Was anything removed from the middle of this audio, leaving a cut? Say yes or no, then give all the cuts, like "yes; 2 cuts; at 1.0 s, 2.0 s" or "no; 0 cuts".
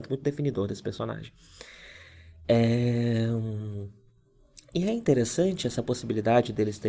no; 0 cuts